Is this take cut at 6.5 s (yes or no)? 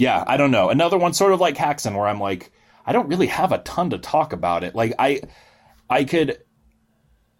no